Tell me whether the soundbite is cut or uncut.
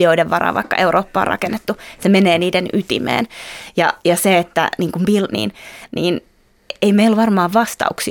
cut